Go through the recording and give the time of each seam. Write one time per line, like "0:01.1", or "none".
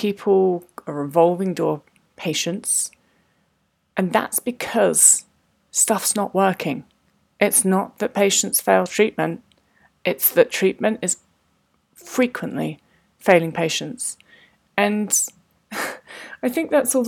none